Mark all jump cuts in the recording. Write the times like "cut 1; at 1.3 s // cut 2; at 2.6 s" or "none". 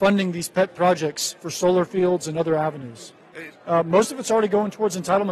cut 1; at 3.5 s